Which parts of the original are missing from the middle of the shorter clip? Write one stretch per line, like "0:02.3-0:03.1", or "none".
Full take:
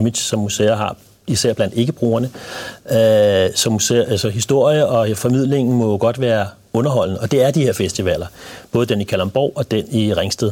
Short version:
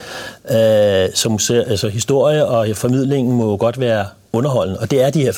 none